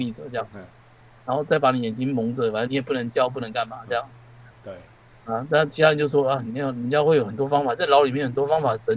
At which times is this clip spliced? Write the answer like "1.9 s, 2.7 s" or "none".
2.7 s, 4.5 s, 6.4 s

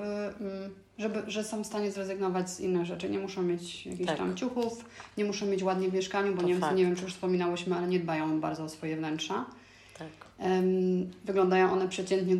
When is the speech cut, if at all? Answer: none

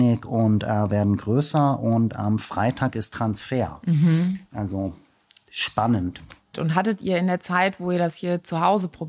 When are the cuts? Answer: 6.5 s

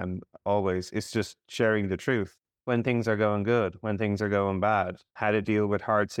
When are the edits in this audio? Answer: none

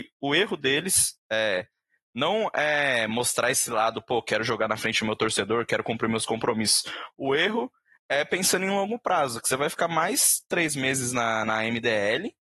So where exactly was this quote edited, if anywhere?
none

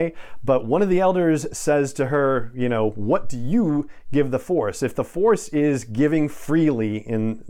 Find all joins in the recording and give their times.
none

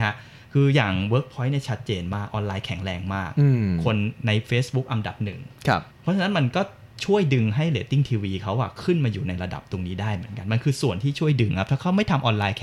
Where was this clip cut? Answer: 5.9 s

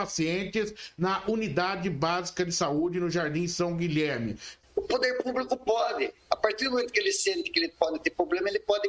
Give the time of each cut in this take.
4.6 s

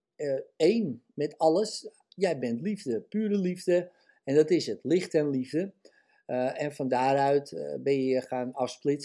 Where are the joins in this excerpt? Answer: none

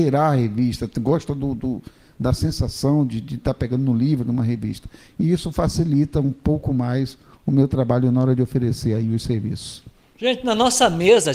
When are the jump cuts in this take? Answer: none

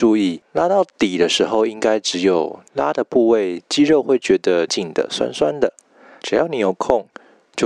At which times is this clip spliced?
4.7 s, 6.2 s

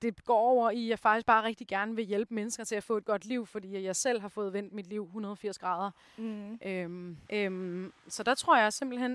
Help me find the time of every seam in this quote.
7.2 s

